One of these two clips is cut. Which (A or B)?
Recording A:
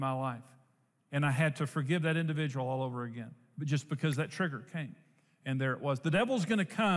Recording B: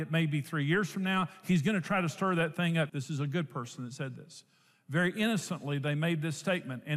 B